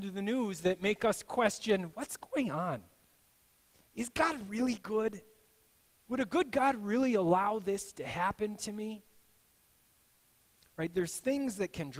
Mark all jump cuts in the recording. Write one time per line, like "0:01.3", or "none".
none

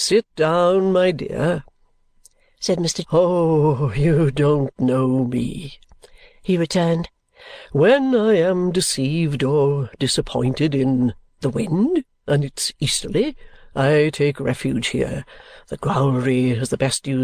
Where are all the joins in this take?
0:03.0

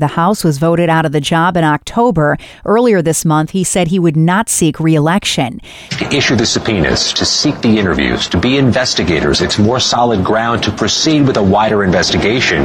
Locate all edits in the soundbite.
0:05.9

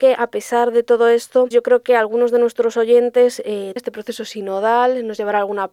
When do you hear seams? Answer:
0:01.5
0:03.8

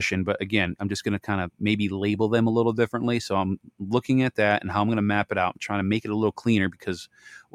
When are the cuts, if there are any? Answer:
none

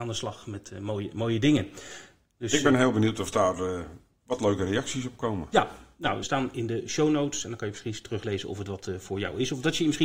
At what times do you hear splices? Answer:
0:06.2

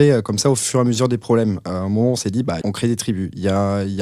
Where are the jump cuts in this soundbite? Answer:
0:02.6

